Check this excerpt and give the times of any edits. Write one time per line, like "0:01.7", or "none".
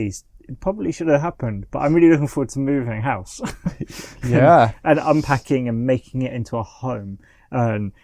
none